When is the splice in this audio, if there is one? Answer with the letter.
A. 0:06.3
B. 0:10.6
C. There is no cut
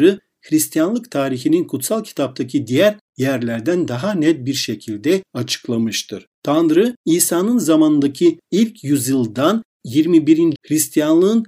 B